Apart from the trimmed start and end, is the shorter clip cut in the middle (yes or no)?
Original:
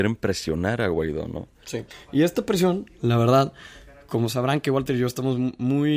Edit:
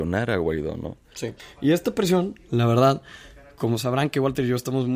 no